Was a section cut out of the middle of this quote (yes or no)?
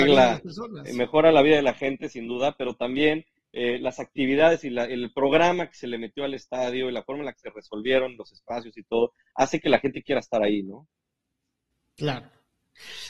no